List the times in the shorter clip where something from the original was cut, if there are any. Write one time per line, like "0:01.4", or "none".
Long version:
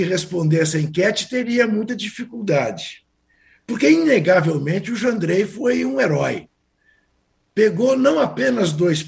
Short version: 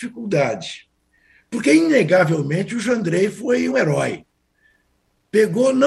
0:03.7